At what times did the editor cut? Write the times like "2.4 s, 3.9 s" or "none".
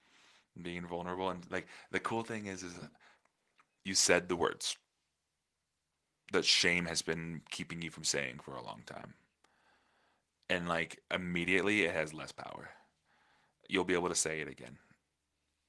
none